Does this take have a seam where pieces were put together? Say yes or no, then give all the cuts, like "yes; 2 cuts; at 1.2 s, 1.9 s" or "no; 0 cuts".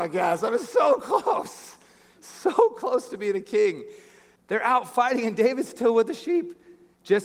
yes; 1 cut; at 4.4 s